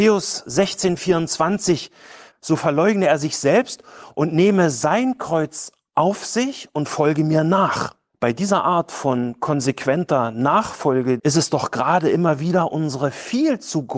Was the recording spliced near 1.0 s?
no; 2 cuts; at 2.3 s, 11.2 s

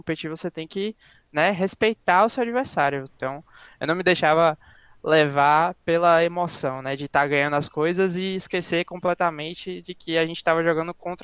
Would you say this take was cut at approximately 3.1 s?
yes; 1 cut; at 3.1 s

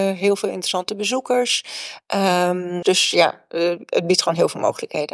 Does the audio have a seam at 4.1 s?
no; 1 cut; at 2.8 s

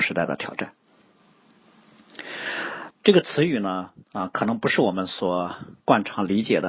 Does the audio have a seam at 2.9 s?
yes; 2 cuts; at 2.9 s, 4.0 s

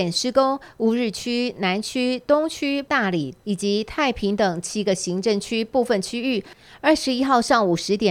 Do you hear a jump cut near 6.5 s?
no; 1 cut; at 2.9 s

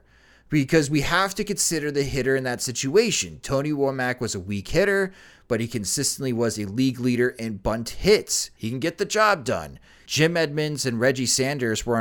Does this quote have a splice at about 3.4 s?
no; 2 cuts; at 8.6 s, 10.1 s

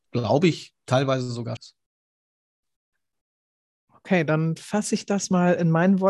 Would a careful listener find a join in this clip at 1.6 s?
yes; 1 cut; at 1.6 s

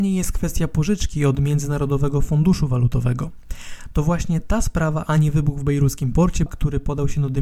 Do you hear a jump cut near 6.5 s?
yes; 1 cut; at 6.5 s

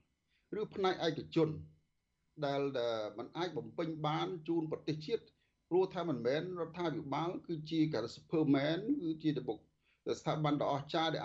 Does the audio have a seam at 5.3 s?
no; 0 cuts

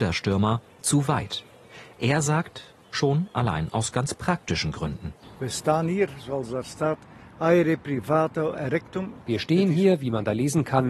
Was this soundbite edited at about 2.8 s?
yes; 1 cut; at 2.8 s

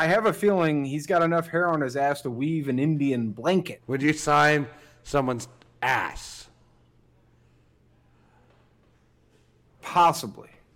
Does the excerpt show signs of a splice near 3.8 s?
yes; 1 cut; at 3.8 s

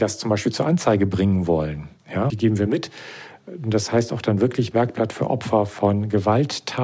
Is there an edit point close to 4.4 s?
no; 1 cut; at 2.3 s

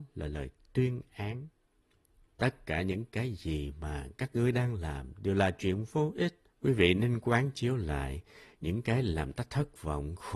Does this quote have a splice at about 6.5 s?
yes; 2 cuts; at 2.3 s, 6.5 s

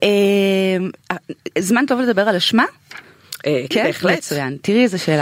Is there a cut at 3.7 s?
yes; 1 cut; at 3.7 s

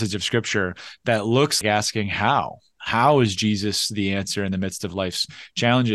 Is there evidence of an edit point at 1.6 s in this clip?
yes; 1 cut; at 1.6 s

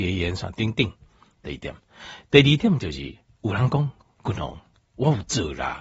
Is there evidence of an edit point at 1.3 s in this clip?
yes; 1 cut; at 1.3 s

